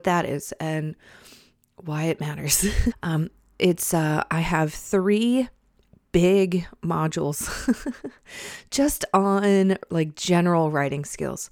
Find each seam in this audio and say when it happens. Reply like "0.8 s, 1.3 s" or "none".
2.9 s